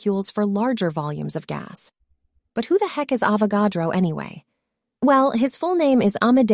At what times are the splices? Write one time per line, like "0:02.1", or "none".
none